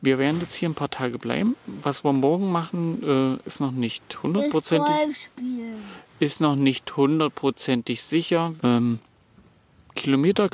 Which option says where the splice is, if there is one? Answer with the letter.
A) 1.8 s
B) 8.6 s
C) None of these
B